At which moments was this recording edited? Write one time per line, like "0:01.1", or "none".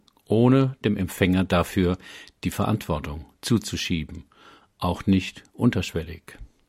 none